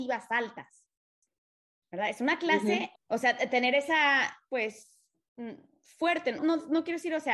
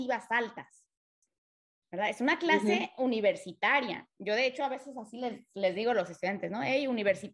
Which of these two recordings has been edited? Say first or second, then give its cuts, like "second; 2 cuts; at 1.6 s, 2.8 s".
first; 3 cuts; at 2.9 s, 4.5 s, 6.4 s